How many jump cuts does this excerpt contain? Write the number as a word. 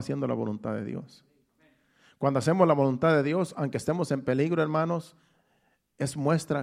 zero